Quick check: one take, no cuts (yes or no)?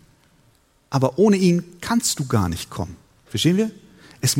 no